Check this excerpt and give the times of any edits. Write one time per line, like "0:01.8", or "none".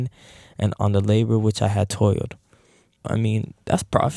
0:03.0